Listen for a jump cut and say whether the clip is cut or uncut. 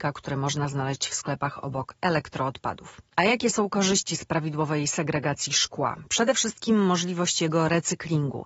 uncut